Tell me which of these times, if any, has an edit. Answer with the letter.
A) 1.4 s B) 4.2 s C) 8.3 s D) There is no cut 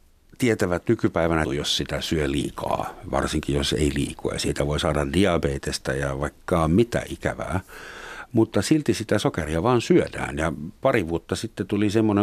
A